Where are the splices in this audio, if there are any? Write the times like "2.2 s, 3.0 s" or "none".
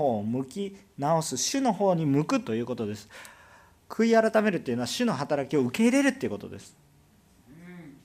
none